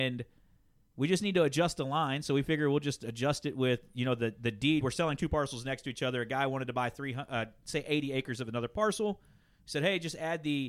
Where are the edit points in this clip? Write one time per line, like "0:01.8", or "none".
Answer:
none